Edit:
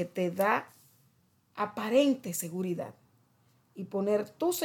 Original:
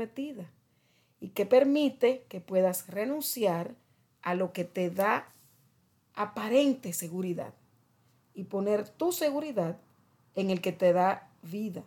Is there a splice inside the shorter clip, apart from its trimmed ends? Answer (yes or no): no